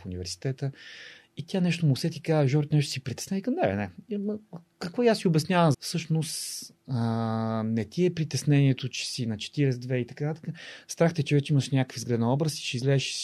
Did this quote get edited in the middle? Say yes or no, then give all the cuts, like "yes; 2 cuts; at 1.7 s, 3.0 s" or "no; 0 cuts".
yes; 1 cut; at 5.7 s